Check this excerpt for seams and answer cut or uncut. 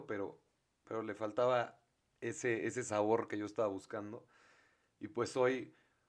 uncut